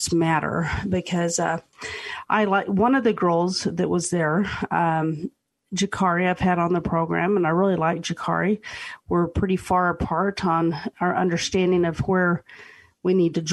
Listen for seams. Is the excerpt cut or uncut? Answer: uncut